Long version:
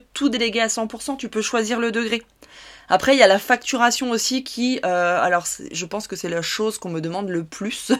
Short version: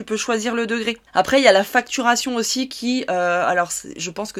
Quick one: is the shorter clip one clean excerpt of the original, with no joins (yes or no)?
no